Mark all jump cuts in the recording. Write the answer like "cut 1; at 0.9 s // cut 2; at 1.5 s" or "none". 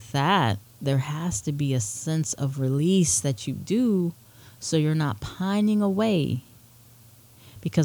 none